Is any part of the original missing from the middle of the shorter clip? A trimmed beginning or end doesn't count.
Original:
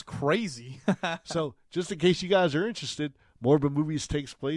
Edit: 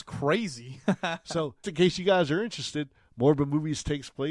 yes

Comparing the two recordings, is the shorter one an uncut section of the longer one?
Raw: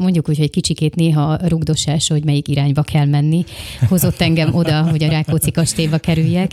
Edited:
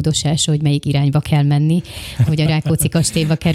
no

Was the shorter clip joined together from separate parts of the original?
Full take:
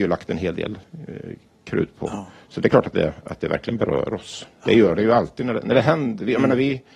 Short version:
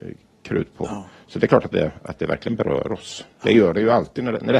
no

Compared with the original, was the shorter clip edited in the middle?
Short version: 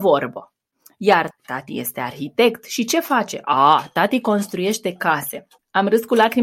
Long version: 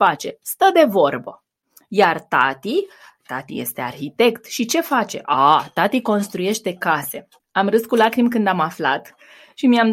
yes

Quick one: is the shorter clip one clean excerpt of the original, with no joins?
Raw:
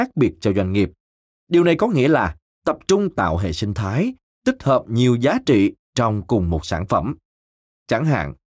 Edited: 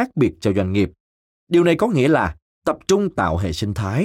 yes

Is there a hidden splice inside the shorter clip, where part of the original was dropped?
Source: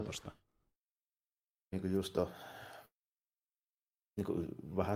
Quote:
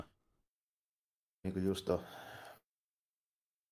no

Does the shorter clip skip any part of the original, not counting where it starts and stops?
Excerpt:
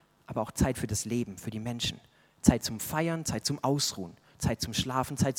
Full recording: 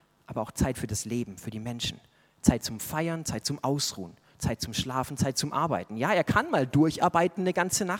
no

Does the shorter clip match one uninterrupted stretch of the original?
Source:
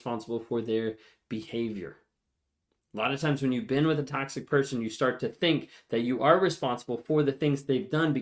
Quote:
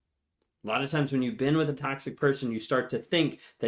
yes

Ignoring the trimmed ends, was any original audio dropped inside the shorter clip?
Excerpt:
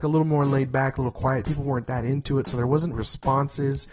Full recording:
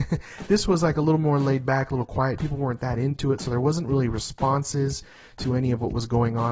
yes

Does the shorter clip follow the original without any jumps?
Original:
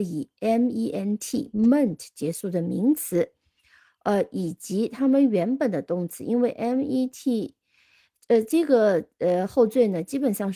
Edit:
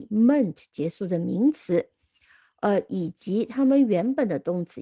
yes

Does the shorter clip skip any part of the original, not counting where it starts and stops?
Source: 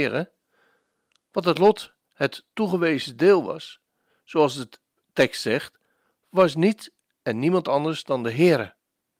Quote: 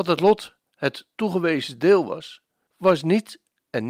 yes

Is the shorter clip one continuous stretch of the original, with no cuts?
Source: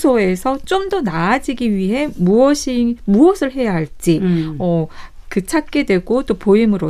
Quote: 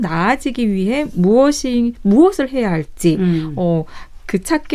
yes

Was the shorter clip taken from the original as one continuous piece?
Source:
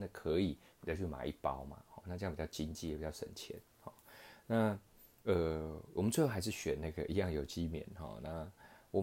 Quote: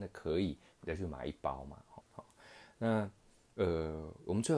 no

